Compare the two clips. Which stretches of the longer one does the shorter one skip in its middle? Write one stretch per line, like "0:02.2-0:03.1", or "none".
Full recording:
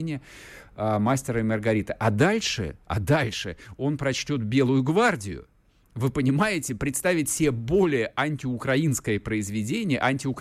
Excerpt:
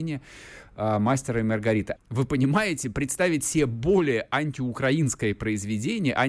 0:02.0-0:05.8

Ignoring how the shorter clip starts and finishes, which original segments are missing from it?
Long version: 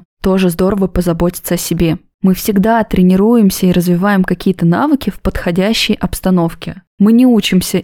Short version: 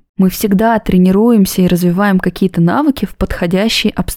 none

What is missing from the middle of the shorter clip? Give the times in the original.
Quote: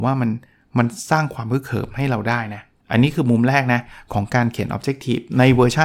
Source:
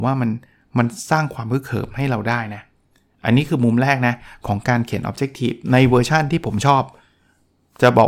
0:02.8-0:03.1

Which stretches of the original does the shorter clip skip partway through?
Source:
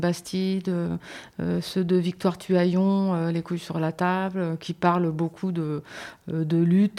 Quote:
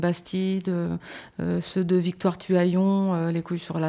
none

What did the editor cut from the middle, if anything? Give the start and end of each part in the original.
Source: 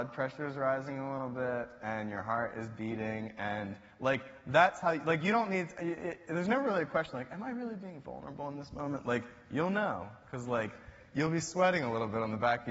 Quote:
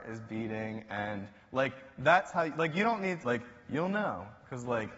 0:05.7-0:09.0

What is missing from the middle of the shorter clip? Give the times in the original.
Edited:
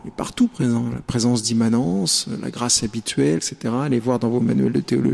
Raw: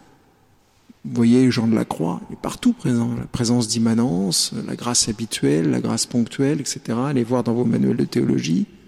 0:05.6-0:06.6

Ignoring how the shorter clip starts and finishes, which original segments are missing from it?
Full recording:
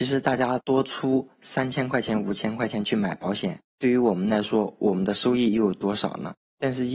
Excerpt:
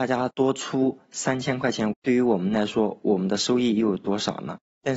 0:02.2-0:03.7

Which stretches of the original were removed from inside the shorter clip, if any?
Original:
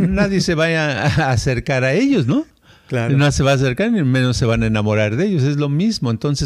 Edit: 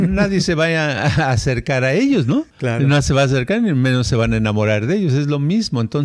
0:02.5-0:02.8

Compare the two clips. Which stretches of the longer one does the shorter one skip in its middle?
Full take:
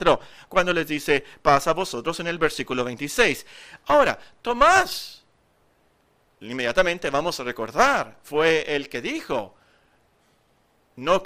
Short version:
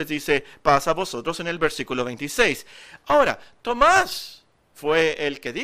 0:05.5-0:08.2

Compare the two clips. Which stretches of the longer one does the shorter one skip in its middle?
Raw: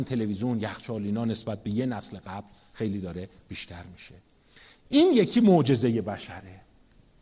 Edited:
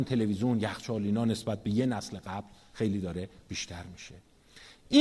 none

